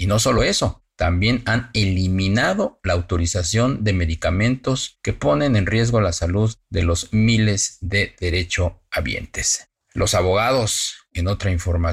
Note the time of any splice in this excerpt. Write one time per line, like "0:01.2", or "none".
none